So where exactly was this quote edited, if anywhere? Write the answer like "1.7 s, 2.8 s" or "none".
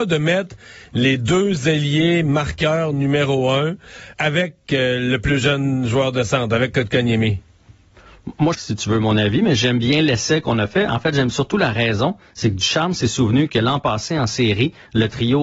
4.1 s, 8.5 s